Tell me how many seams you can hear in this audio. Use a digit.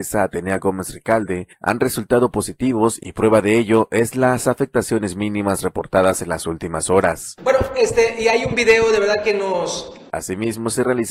2